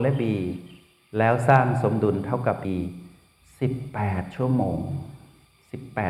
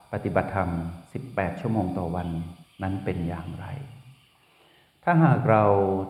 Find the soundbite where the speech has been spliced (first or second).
first